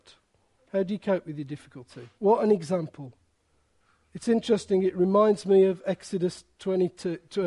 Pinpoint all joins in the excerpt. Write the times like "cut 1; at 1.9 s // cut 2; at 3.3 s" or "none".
cut 1; at 2.1 s